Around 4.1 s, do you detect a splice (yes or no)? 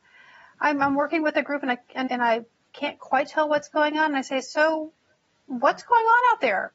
no